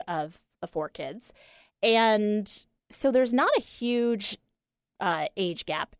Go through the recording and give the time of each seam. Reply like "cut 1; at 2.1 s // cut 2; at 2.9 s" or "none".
none

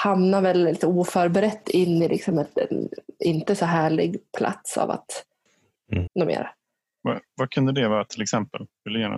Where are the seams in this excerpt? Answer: cut 1; at 6.1 s

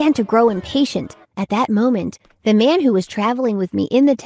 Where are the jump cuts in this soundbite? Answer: cut 1; at 1.2 s

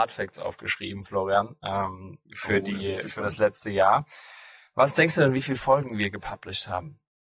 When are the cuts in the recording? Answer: none

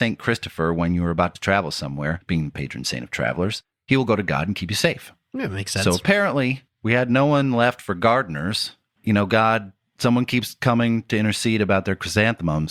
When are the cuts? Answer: none

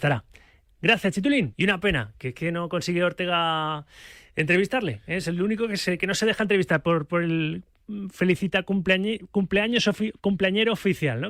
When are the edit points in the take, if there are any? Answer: cut 1; at 1.5 s

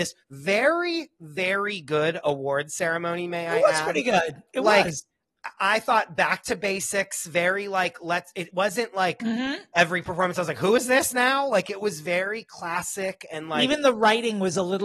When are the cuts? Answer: none

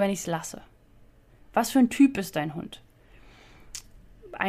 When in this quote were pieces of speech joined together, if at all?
none

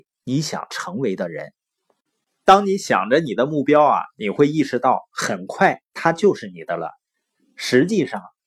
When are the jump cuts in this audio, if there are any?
none

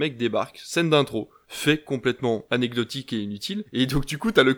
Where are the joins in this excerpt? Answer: cut 1; at 1.4 s // cut 2; at 3.7 s

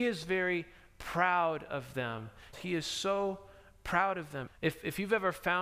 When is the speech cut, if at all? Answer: cut 1; at 2.5 s // cut 2; at 4.5 s

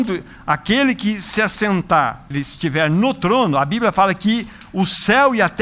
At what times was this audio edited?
cut 1; at 2.3 s

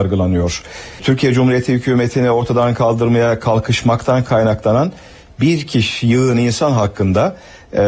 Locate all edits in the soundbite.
none

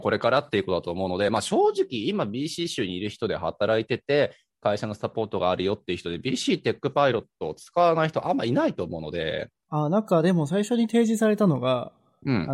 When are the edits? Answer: none

